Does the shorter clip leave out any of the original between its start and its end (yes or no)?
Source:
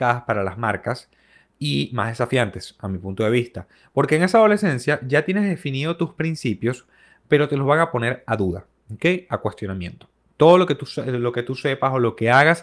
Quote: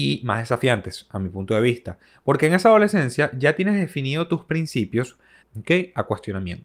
yes